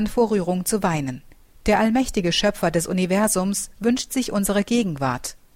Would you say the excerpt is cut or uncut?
cut